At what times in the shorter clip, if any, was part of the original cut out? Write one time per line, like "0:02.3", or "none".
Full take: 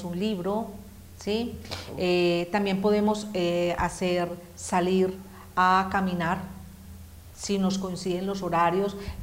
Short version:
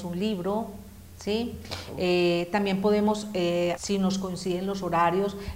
0:03.8